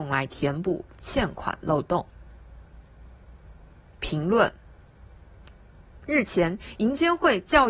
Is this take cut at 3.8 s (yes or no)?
no